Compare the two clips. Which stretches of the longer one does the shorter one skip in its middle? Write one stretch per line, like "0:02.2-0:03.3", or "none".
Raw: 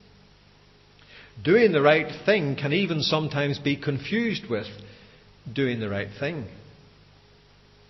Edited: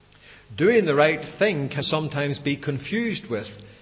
0:02.7-0:03.0